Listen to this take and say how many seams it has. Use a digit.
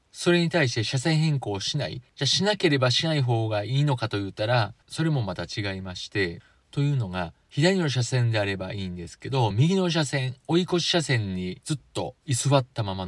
0